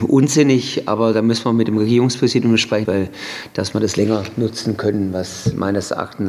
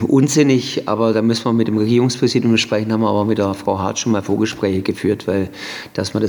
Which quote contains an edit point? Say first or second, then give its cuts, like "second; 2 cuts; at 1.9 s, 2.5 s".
first; 1 cut; at 2.8 s